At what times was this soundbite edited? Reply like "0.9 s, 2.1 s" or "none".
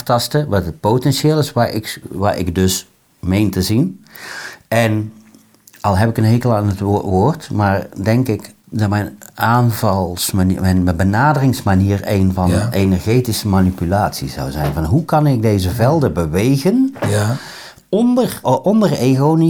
8.6 s, 18.4 s